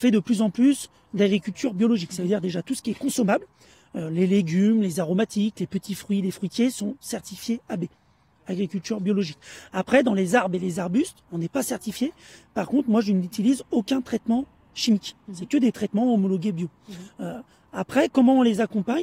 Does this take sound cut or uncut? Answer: uncut